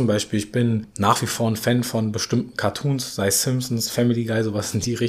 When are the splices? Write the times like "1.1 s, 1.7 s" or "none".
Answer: none